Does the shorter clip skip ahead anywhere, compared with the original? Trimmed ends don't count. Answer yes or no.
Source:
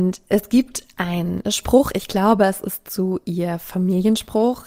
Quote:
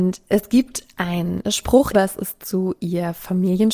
yes